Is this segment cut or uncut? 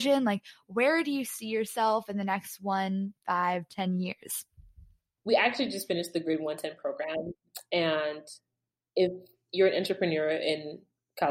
uncut